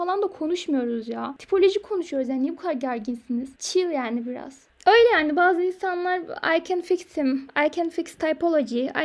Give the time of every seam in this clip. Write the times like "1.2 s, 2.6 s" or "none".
none